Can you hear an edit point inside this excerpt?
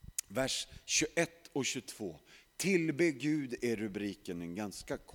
no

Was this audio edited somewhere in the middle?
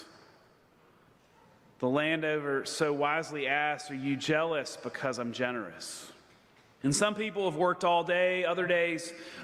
yes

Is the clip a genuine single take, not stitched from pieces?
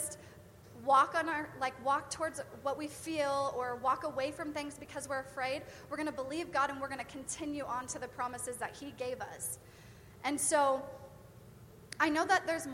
yes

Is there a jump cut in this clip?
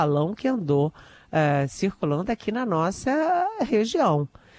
no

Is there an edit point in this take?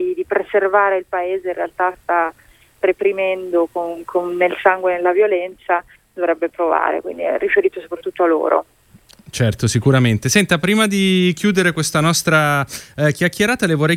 no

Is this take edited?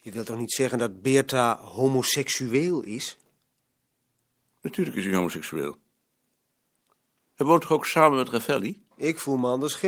yes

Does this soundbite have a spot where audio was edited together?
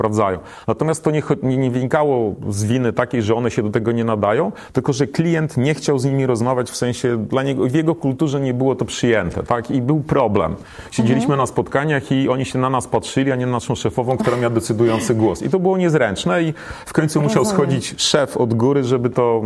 no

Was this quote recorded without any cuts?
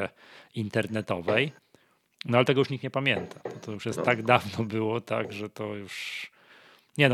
yes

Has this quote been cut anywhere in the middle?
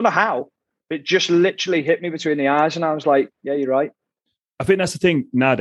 no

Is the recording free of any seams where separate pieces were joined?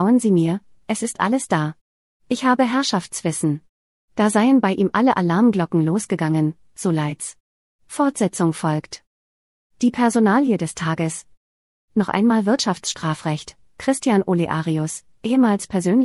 yes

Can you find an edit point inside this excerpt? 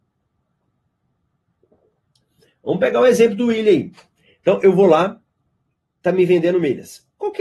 no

